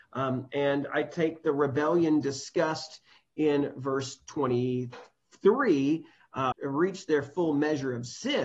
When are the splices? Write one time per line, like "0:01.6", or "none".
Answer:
0:06.5